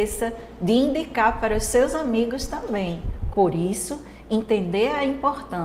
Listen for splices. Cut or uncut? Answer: cut